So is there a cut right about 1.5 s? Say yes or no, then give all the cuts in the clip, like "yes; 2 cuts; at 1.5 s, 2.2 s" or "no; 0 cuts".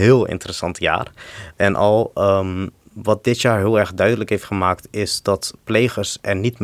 yes; 1 cut; at 1.5 s